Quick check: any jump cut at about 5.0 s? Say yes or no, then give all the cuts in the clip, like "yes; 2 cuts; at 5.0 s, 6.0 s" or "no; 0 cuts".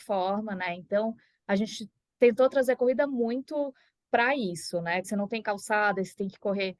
yes; 1 cut; at 5.0 s